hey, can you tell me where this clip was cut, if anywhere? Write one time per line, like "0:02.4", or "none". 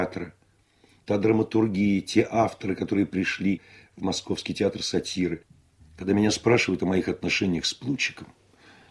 none